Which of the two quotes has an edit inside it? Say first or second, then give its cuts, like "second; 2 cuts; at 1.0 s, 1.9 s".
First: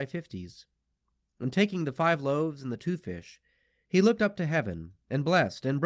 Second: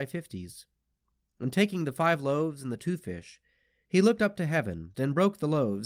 second; 1 cut; at 4.9 s